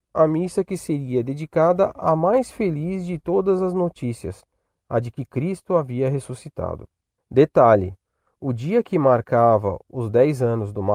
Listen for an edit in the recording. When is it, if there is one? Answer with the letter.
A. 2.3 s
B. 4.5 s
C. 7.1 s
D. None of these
D